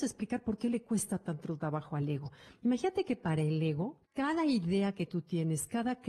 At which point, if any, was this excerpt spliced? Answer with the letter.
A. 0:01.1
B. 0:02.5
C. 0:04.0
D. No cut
C